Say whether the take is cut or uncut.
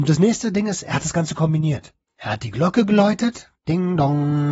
uncut